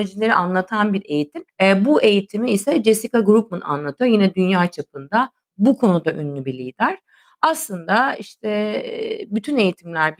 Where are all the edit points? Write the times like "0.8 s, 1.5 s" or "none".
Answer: 1.5 s

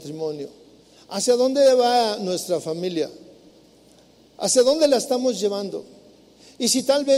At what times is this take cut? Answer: none

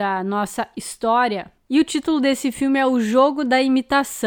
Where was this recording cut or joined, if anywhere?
none

